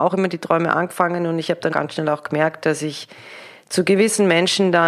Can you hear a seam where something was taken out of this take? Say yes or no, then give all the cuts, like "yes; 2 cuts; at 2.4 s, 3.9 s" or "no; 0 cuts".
yes; 1 cut; at 1.7 s